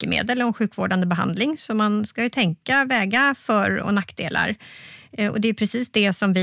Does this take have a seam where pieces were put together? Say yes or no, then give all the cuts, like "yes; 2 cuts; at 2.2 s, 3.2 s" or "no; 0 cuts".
no; 0 cuts